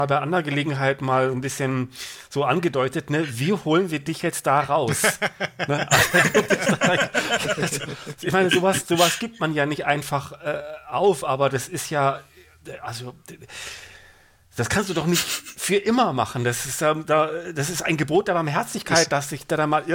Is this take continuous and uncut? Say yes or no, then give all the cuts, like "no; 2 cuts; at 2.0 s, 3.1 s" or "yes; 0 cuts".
yes; 0 cuts